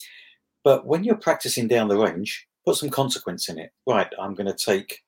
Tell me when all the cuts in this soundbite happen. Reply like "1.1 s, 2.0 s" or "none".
3.8 s

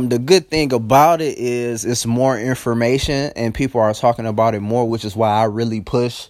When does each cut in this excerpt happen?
4.9 s

